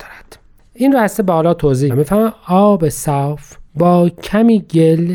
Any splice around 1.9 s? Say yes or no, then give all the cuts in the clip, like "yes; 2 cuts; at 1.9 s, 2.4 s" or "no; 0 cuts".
yes; 2 cuts; at 1.9 s, 3.7 s